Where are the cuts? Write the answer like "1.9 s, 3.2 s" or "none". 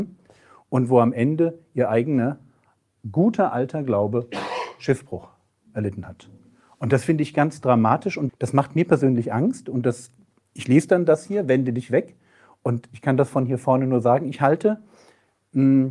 8.3 s